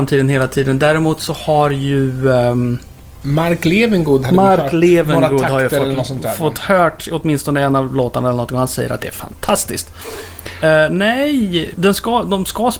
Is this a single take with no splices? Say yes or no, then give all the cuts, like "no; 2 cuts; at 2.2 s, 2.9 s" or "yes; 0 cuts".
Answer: no; 2 cuts; at 10.6 s, 11.7 s